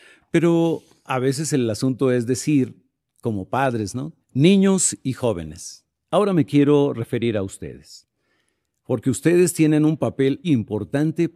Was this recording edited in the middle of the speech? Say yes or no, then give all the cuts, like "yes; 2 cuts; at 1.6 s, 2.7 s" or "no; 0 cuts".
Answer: yes; 2 cuts; at 4.2 s, 10.4 s